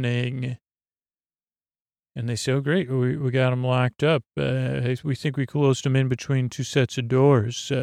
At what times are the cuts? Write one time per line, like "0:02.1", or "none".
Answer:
none